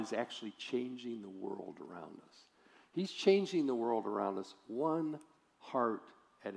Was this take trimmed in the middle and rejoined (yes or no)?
no